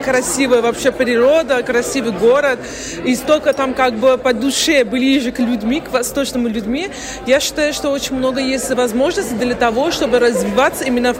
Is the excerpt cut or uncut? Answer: uncut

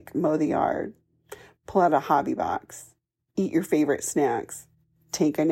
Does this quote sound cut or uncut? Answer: uncut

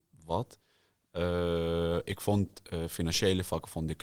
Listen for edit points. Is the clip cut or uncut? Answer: uncut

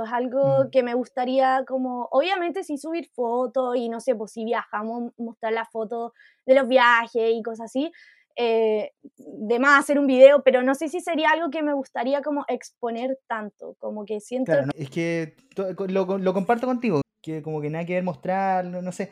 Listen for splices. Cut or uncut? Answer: cut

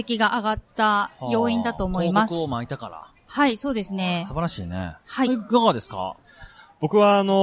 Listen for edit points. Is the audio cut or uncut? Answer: uncut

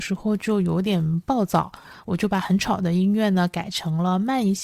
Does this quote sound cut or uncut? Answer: uncut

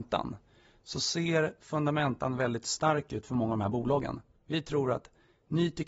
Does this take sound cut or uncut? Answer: cut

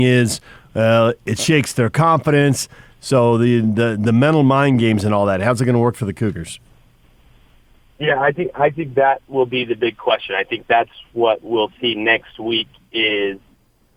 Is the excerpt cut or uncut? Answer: cut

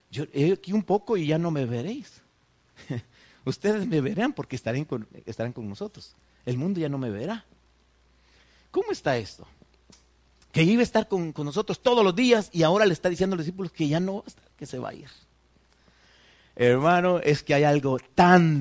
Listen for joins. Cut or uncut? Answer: uncut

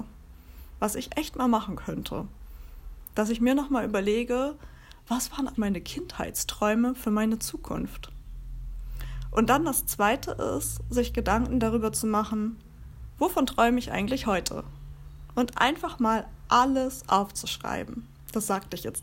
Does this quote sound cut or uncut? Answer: cut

